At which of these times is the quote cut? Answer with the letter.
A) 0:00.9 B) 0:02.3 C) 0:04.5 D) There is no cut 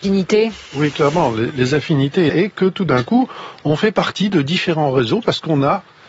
B